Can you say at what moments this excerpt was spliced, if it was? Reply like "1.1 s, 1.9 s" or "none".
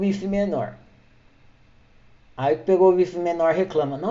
none